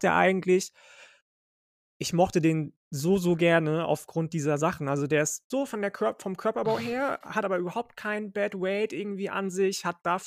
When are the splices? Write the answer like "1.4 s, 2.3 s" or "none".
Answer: 5.5 s